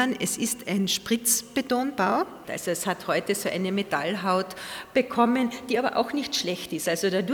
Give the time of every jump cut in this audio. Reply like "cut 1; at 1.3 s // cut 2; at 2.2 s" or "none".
cut 1; at 2.4 s

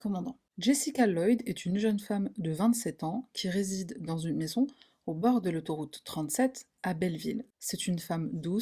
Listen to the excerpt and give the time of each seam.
none

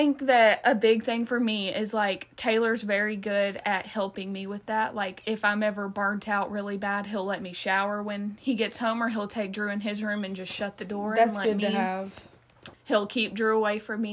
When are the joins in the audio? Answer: cut 1; at 12.7 s

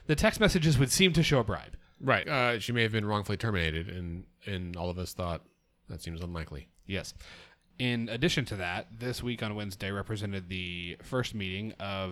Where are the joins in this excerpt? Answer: cut 1; at 2.2 s

